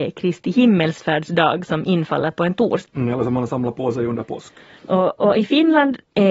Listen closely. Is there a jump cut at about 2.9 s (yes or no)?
yes